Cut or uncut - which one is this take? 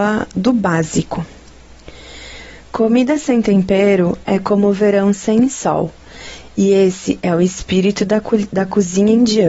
uncut